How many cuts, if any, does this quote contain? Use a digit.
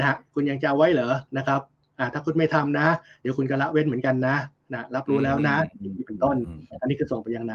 1